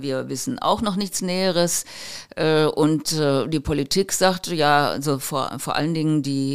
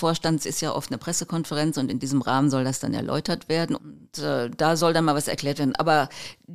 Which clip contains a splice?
second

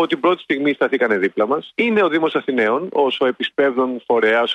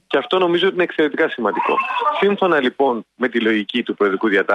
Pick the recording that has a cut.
first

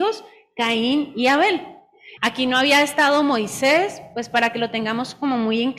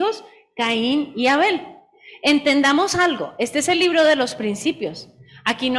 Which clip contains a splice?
first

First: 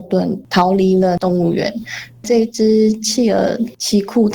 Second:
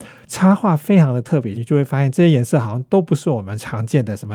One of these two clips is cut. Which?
second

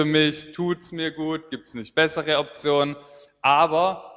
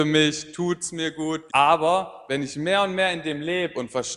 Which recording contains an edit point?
second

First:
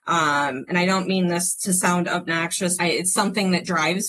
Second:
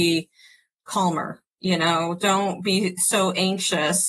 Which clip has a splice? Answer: first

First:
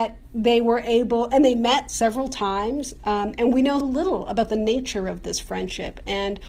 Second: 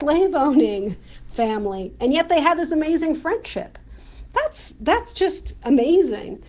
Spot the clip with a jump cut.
first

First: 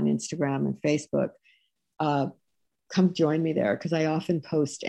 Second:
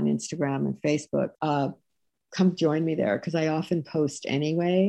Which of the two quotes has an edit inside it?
second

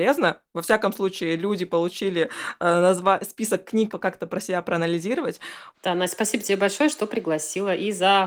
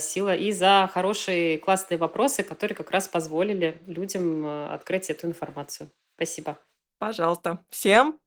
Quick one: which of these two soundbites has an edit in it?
first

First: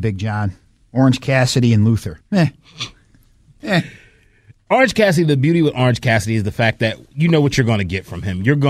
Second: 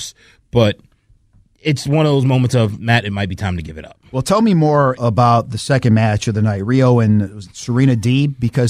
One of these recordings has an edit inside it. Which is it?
second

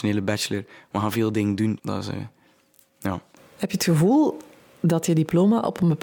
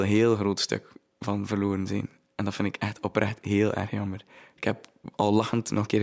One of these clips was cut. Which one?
first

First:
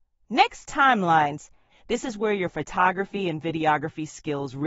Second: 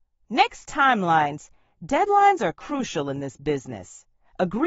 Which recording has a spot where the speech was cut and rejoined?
first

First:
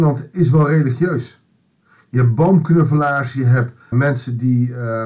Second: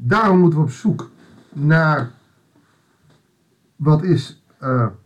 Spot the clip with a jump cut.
first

